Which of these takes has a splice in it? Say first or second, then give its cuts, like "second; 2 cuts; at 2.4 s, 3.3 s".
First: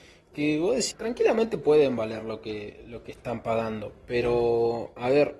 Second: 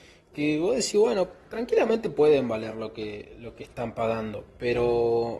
first; 1 cut; at 0.9 s